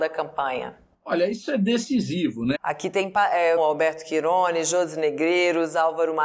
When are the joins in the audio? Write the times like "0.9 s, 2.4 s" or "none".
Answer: 2.5 s, 3.6 s